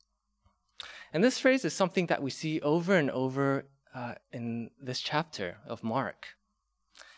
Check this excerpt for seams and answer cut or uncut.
uncut